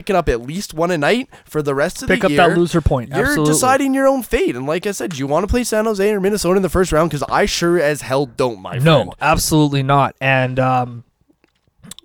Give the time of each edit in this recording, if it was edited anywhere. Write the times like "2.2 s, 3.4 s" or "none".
none